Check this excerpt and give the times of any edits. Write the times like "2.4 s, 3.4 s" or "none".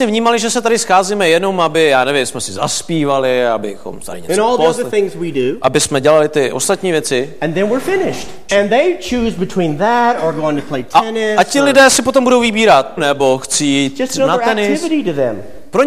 8.5 s, 13.0 s